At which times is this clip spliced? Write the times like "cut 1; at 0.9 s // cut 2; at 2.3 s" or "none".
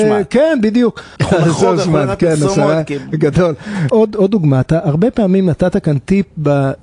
cut 1; at 1.2 s // cut 2; at 3.9 s